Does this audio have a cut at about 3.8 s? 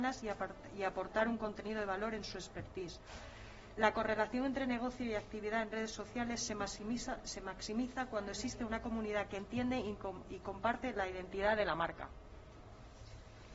no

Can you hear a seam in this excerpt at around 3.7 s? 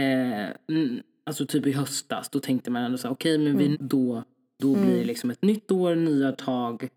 yes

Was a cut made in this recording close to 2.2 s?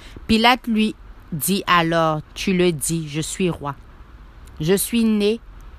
yes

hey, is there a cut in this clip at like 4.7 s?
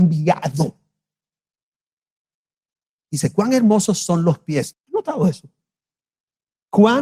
yes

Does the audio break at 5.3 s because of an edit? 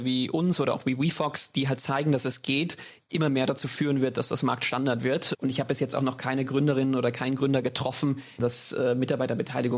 yes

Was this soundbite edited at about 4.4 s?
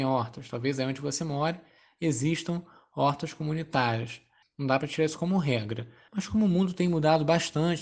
yes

